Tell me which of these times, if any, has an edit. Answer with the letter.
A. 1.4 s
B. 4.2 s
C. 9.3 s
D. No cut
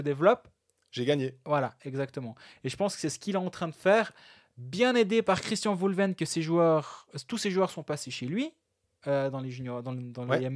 D